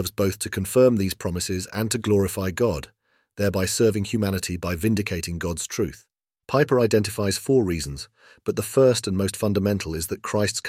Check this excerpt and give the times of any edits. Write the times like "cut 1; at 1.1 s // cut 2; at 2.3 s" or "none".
cut 1; at 6.4 s